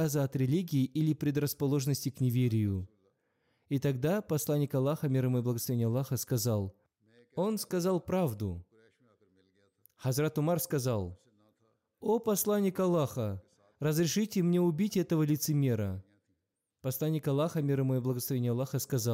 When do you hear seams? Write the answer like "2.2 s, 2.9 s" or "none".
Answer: none